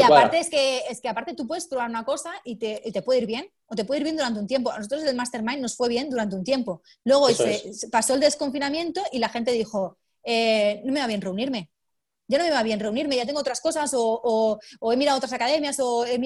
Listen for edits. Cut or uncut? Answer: uncut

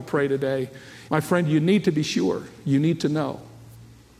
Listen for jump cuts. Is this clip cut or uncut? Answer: cut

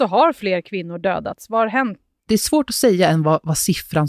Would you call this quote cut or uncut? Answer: cut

